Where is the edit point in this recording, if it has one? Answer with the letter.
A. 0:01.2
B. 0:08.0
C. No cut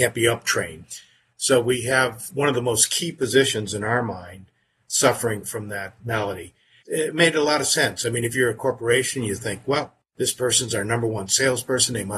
C